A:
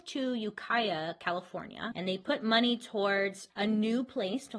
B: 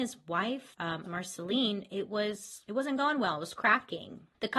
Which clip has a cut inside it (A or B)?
B